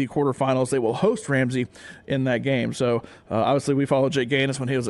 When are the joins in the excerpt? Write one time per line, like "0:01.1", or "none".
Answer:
none